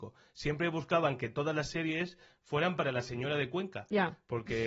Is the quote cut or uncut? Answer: uncut